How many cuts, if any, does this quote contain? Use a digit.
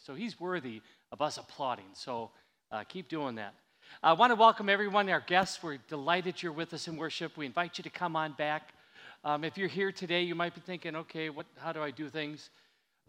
0